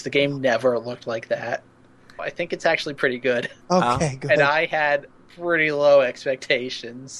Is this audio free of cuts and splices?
no; 2 cuts; at 2.2 s, 3.6 s

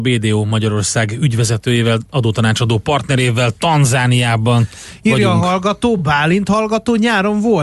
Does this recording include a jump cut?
no; 0 cuts

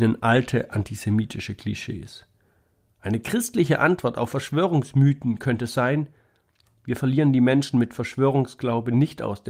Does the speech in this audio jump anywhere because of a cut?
no; 0 cuts

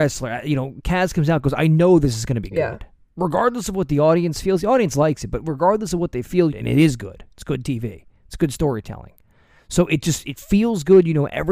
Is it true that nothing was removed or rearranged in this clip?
no; 1 cut; at 6.5 s

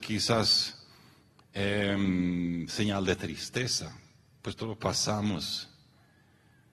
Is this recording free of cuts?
yes; 0 cuts

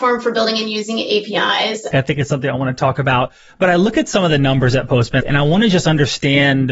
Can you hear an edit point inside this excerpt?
yes; 2 cuts; at 1.9 s, 5.2 s

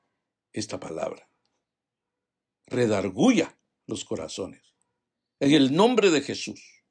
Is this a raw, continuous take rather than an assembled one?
yes; 0 cuts

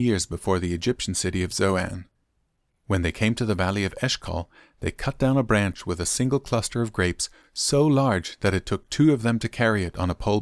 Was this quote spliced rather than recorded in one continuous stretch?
no; 0 cuts

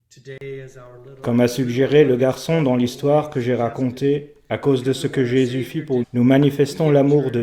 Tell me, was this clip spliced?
yes; 1 cut; at 6.0 s

